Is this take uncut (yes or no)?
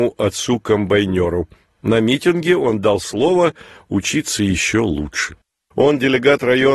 no